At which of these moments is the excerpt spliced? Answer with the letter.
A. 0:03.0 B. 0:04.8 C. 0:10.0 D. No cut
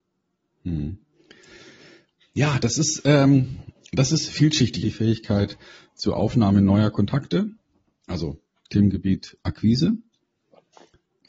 B